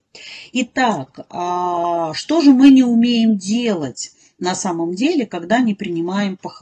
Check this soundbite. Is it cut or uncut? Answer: uncut